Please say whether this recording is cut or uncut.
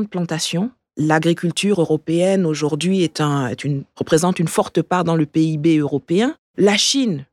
uncut